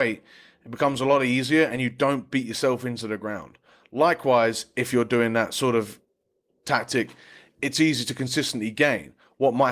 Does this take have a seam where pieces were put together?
yes; 1 cut; at 6.5 s

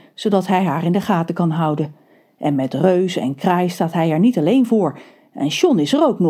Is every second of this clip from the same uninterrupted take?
yes; 0 cuts

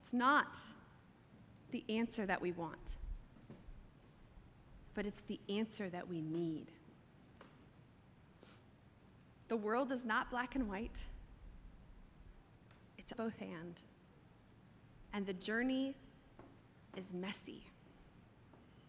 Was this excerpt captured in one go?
no; 2 cuts; at 9.4 s, 13.1 s

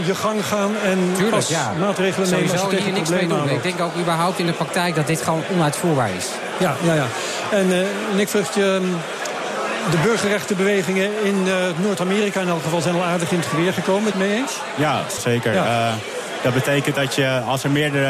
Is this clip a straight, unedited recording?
no; 3 cuts; at 14.1 s, 15.2 s, 16.4 s

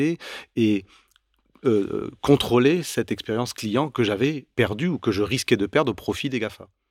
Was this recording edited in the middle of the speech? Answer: yes; 1 cut; at 4.5 s

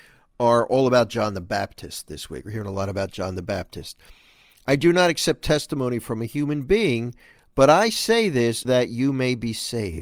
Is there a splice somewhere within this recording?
yes; 1 cut; at 8.6 s

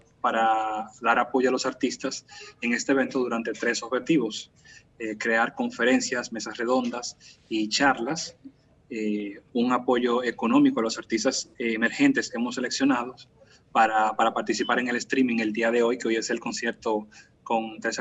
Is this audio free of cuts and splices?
yes; 0 cuts

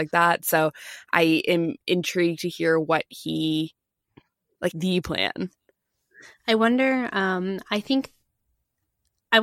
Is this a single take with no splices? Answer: no; 1 cut; at 4.7 s

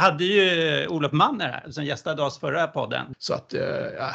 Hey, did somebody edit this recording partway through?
yes; 1 cut; at 3.1 s

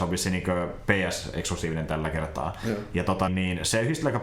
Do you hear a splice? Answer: yes; 1 cut; at 3.3 s

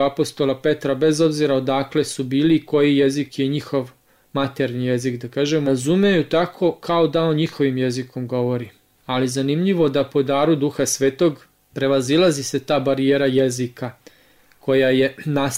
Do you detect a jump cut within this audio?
yes; 2 cuts; at 5.7 s, 8.9 s

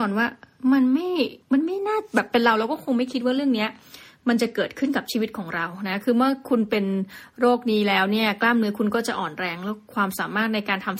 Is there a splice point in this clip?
yes; 1 cut; at 1.4 s

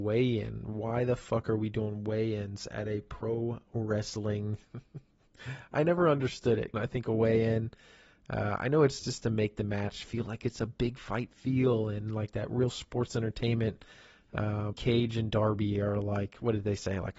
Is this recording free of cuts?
no; 2 cuts; at 6.7 s, 14.7 s

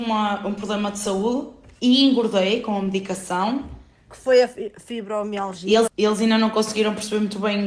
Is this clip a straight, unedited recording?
no; 1 cut; at 5.9 s

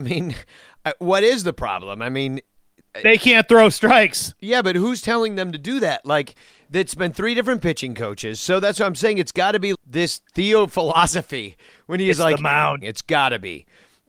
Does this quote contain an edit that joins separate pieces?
yes; 2 cuts; at 9.7 s, 12.8 s

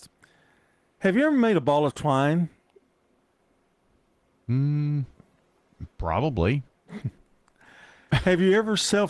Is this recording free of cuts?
yes; 0 cuts

